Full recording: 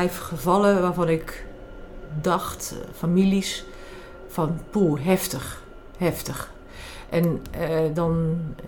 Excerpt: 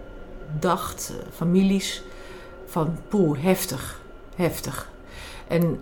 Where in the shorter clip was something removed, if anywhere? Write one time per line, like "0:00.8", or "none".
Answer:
none